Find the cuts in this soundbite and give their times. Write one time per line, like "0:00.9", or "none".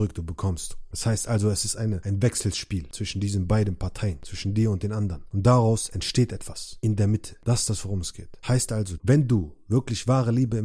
0:00.9
0:09.0